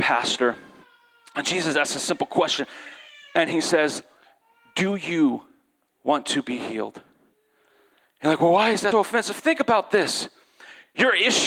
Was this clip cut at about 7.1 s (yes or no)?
no